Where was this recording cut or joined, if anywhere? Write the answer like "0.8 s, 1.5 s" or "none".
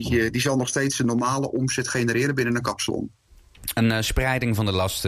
none